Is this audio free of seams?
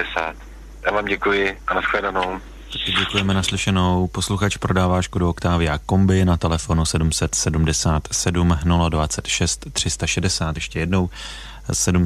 yes; 0 cuts

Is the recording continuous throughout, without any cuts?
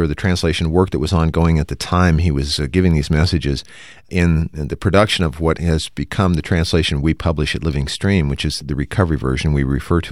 yes; 0 cuts

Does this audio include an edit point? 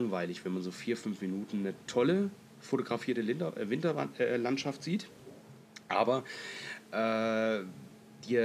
no; 0 cuts

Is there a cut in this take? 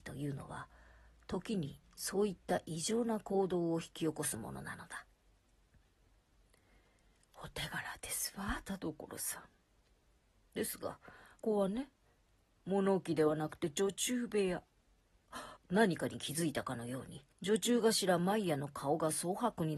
yes; 3 cuts; at 11.4 s, 15.6 s, 17.3 s

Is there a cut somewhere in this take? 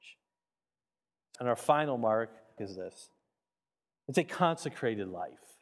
yes; 2 cuts; at 1.4 s, 2.6 s

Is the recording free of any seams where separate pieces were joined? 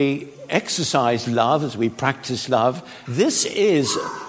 no; 1 cut; at 3.0 s

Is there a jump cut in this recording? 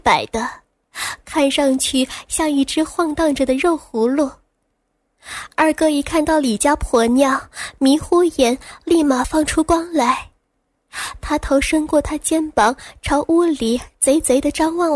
no; 0 cuts

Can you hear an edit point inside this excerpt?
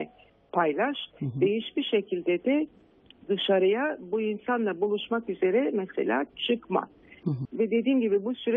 yes; 1 cut; at 7.4 s

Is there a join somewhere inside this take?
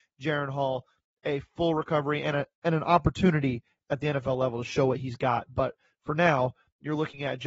no; 0 cuts

